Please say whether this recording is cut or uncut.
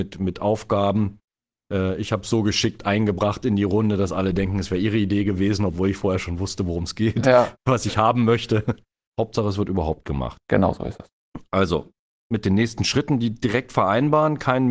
cut